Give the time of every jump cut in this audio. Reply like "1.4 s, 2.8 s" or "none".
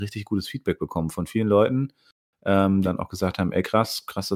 2.8 s